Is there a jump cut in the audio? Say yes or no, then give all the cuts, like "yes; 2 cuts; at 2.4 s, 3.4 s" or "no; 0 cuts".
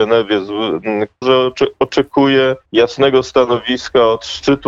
yes; 2 cuts; at 1.2 s, 2.7 s